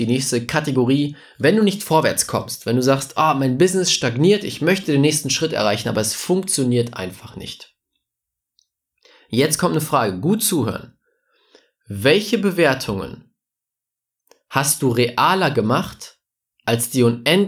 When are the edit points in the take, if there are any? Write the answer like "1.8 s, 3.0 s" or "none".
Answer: none